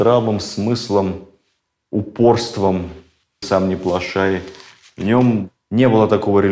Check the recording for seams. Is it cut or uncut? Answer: cut